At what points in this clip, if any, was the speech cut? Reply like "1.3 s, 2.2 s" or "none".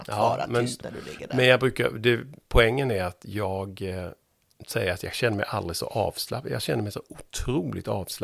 none

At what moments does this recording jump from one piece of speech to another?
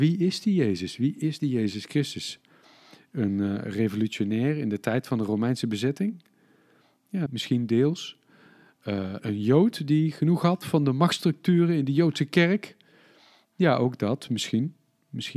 7.3 s, 9.2 s

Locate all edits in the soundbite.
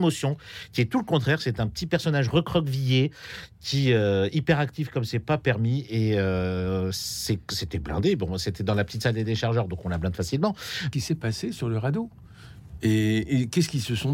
10.9 s

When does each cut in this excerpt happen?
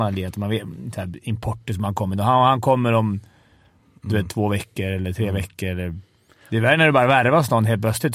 none

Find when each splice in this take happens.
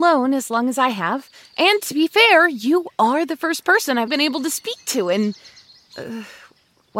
4.1 s

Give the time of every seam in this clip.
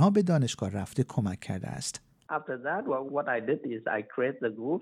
3.1 s

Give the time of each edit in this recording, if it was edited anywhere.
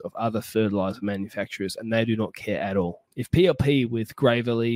3.1 s

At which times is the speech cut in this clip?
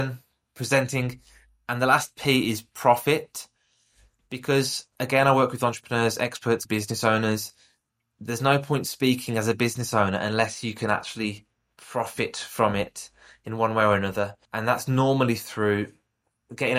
6.6 s, 14.4 s

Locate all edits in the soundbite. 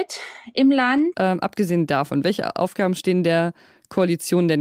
1.1 s

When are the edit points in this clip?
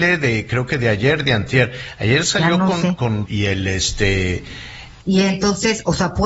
3.3 s, 5.0 s

